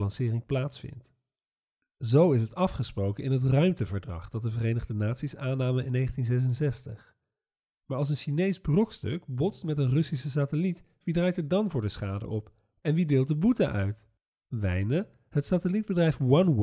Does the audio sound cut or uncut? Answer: cut